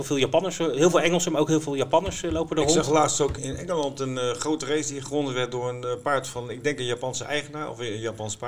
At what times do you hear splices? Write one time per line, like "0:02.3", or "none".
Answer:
0:03.4